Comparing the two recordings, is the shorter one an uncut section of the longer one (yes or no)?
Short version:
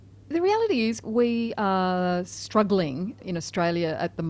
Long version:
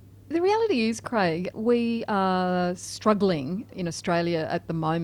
no